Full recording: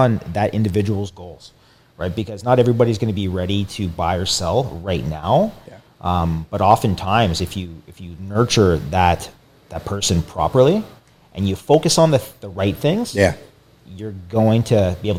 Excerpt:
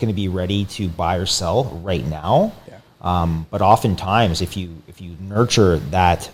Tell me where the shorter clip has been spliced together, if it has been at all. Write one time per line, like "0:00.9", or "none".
none